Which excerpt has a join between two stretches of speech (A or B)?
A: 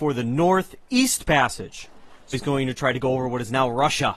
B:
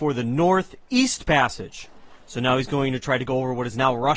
A